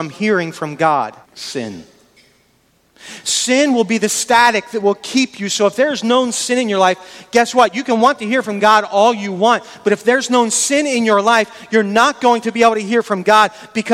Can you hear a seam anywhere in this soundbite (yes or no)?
yes